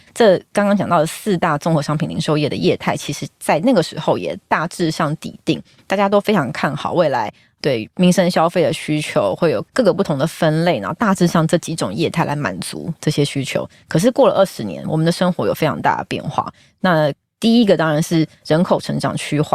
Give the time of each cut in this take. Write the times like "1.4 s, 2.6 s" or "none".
none